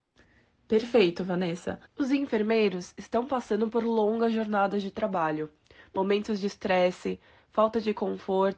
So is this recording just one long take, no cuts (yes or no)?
no